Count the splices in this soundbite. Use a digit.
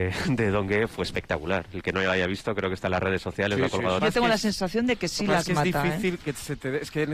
1